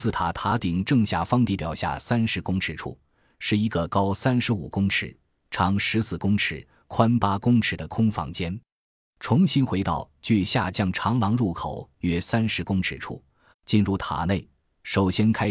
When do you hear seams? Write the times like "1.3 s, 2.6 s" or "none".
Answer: 13.5 s